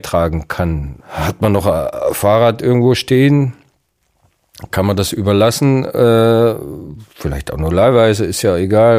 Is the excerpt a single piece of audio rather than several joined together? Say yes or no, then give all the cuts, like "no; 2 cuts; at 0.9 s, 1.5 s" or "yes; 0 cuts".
no; 2 cuts; at 1.0 s, 7.1 s